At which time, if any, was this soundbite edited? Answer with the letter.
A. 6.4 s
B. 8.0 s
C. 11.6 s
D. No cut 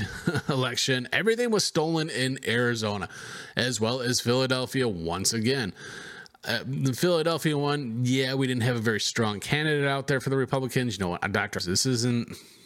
C